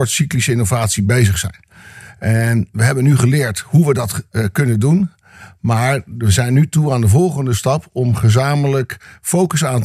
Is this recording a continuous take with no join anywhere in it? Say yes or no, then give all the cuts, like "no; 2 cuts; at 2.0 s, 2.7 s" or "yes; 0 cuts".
yes; 0 cuts